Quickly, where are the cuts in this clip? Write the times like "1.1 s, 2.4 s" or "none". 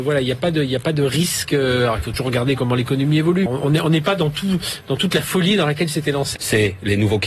3.5 s, 6.4 s